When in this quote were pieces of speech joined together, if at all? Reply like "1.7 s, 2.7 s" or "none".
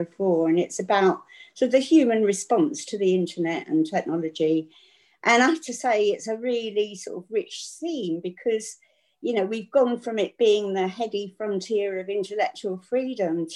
none